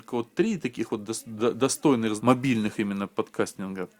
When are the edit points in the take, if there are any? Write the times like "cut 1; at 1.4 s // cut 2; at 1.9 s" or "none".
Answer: cut 1; at 2.2 s